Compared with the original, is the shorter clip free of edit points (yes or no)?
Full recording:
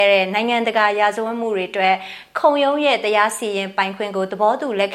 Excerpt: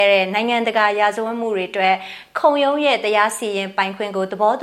yes